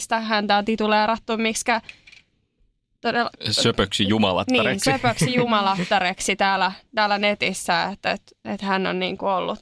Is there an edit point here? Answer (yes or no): no